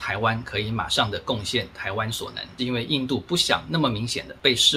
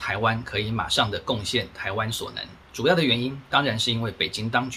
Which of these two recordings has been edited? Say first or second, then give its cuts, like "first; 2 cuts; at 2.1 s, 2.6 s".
first; 1 cut; at 2.6 s